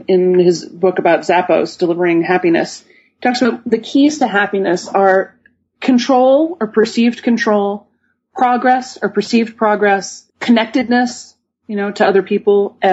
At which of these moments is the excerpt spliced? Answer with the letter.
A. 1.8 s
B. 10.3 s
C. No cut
B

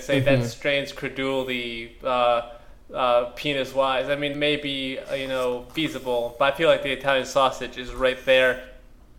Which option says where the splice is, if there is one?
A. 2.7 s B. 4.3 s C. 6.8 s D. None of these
B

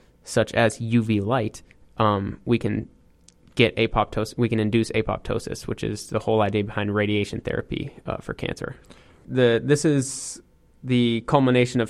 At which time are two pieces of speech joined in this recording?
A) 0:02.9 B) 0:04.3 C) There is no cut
C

